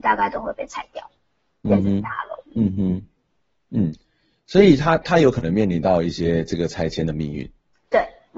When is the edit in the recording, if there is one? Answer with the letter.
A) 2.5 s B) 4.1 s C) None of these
A